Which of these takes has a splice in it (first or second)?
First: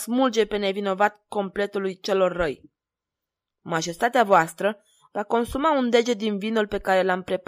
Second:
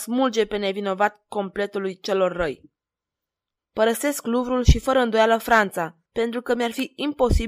second